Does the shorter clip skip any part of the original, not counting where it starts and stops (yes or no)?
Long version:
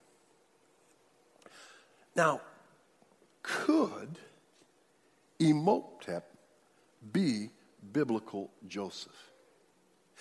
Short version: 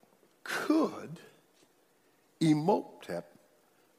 no